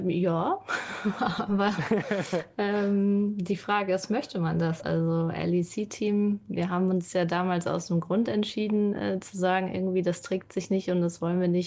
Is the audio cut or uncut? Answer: uncut